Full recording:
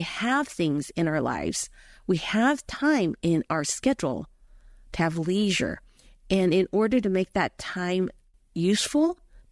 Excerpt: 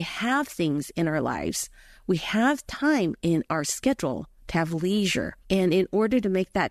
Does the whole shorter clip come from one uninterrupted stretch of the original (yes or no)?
no